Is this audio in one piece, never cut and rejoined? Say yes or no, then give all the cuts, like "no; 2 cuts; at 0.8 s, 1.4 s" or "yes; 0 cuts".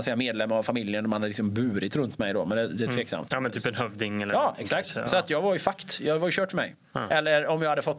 yes; 0 cuts